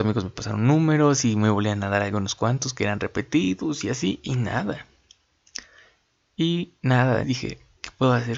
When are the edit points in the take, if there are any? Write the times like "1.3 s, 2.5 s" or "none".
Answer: 7.2 s

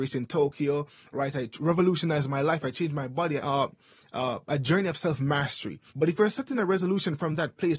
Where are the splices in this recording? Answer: 3.4 s, 5.9 s

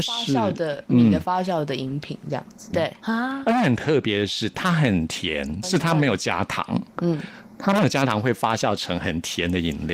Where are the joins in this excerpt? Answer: 2.7 s, 5.6 s

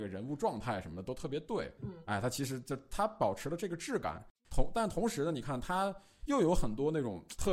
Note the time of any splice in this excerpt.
1.8 s

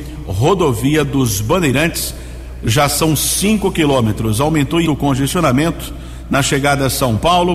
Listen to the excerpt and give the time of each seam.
4.8 s

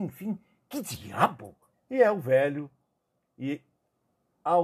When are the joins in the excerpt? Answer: 1.7 s

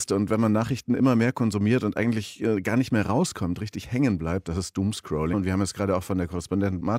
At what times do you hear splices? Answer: 5.3 s

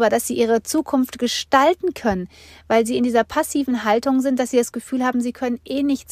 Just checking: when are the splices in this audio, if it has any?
none

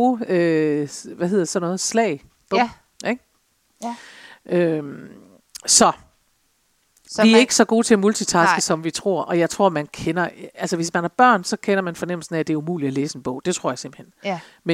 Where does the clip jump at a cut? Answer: none

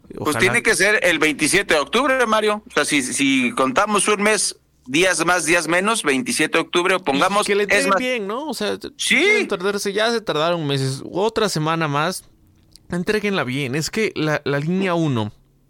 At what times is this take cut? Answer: none

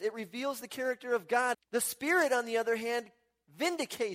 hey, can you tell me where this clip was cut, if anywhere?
1.5 s

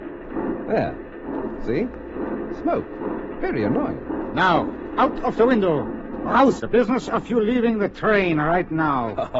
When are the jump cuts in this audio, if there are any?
6.6 s

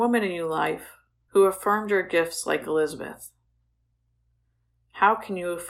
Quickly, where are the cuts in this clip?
none

